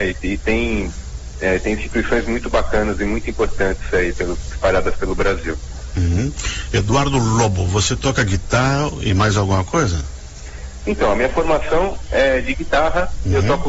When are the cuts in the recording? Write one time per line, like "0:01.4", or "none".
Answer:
none